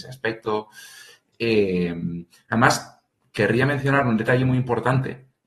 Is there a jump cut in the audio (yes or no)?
no